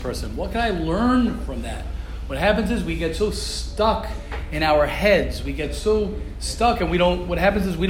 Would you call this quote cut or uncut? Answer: uncut